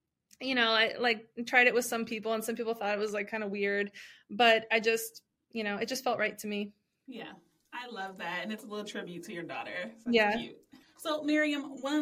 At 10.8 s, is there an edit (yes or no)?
yes